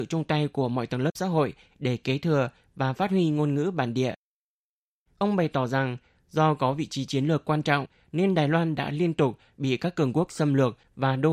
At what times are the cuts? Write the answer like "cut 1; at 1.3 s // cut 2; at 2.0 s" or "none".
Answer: cut 1; at 5.1 s

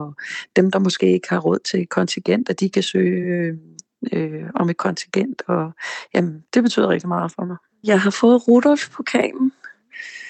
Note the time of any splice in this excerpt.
none

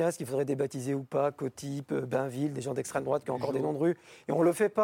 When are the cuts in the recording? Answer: none

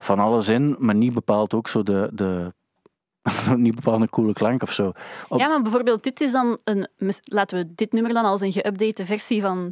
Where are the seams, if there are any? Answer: none

